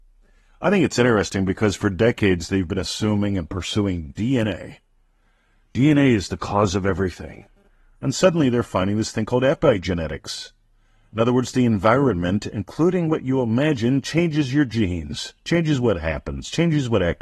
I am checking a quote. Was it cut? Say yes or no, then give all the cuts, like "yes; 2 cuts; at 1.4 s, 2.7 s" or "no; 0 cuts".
no; 0 cuts